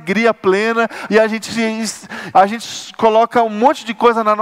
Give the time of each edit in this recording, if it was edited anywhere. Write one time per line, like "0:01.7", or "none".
0:01.1
0:02.3